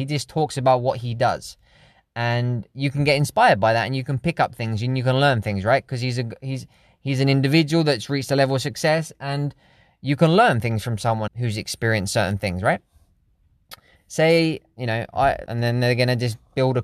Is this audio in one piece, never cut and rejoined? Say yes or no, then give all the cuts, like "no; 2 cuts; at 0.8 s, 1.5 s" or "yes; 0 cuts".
no; 3 cuts; at 11.3 s, 14.0 s, 15.5 s